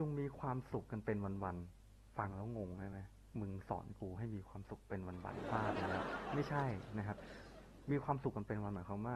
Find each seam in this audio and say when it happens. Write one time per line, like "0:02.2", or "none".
none